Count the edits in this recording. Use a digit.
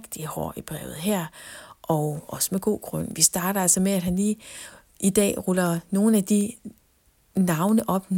0